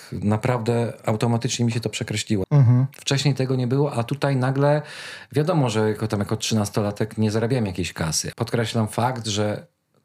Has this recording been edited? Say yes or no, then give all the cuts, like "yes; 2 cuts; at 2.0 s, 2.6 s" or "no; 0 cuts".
yes; 2 cuts; at 2.4 s, 8.3 s